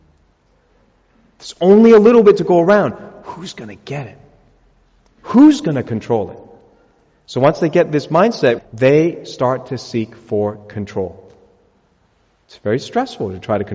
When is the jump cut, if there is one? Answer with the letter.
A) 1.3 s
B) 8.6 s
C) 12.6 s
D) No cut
B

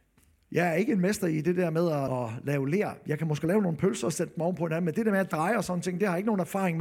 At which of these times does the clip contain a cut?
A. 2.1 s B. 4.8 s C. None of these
A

